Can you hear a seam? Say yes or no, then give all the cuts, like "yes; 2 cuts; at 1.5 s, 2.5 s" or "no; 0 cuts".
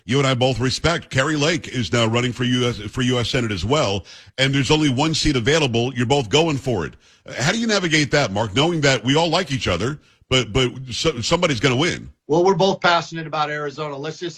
yes; 1 cut; at 12.2 s